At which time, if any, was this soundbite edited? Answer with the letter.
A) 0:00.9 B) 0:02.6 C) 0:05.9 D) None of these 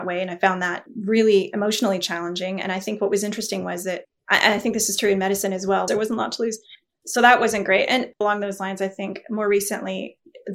C